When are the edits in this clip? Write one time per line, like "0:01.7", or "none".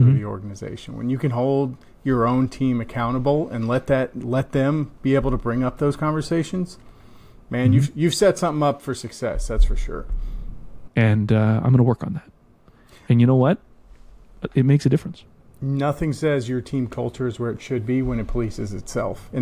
0:10.9